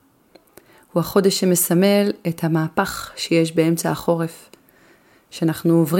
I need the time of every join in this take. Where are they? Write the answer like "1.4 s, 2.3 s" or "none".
none